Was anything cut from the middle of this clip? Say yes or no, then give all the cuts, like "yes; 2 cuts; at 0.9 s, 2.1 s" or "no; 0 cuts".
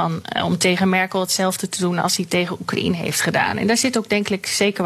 no; 0 cuts